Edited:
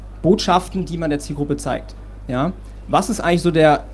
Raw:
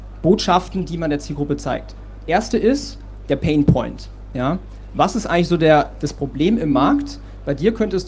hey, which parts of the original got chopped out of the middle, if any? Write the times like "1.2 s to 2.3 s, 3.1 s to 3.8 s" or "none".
2.2 s to 4.3 s